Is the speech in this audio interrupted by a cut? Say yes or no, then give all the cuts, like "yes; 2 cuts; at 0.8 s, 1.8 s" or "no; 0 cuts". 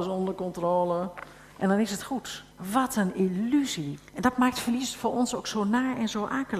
yes; 2 cuts; at 2.5 s, 4.0 s